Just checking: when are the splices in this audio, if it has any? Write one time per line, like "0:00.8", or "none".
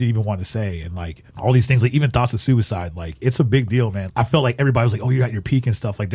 0:01.3
0:04.1